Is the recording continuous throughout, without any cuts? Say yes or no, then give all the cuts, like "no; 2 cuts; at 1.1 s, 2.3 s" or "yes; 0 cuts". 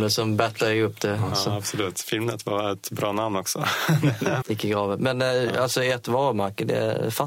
no; 1 cut; at 4.4 s